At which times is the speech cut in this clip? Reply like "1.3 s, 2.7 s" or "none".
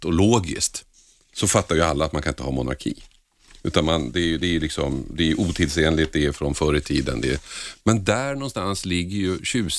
none